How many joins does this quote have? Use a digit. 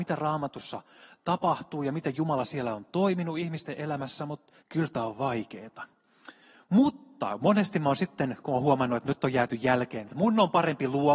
1